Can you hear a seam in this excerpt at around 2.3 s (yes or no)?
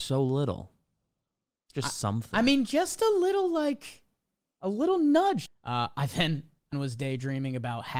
no